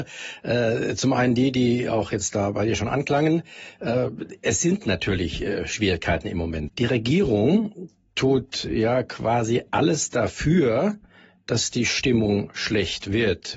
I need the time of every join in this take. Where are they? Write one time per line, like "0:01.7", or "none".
0:06.7